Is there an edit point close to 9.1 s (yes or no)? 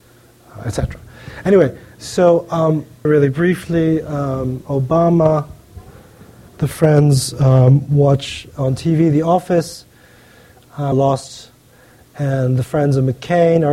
no